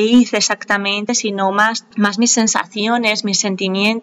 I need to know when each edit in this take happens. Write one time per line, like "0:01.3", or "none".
none